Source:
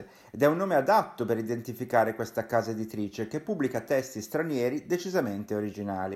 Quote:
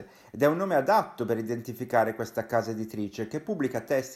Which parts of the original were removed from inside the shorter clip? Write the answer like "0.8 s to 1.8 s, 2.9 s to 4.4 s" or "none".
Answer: none